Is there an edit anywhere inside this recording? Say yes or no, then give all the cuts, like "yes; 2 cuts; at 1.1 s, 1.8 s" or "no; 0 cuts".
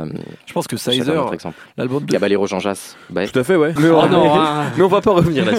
yes; 1 cut; at 3.8 s